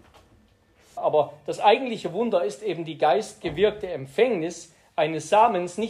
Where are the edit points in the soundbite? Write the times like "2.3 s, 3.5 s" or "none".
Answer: 1.0 s